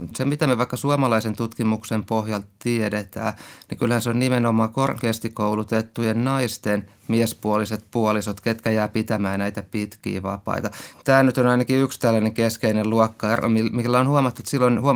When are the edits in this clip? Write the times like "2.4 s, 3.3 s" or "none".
10.9 s